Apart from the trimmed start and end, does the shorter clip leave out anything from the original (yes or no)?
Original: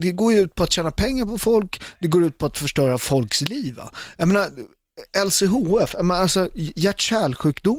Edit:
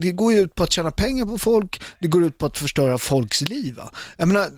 no